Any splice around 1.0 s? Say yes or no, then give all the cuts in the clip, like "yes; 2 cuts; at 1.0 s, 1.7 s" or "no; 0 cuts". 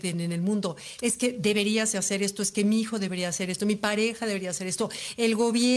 yes; 2 cuts; at 1.0 s, 3.6 s